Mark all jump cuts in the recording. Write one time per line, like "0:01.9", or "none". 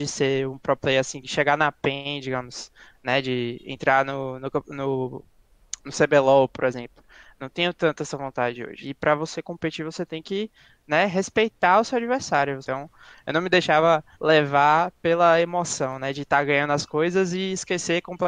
0:08.8
0:12.6
0:14.1